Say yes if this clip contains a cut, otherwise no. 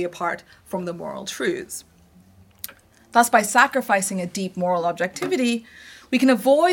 no